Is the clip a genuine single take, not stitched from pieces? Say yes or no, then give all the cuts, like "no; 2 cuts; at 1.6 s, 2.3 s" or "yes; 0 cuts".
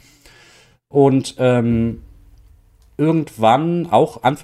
yes; 0 cuts